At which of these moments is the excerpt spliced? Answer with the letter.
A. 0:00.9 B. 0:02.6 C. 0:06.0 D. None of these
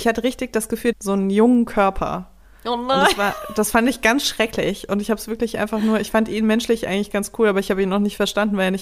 A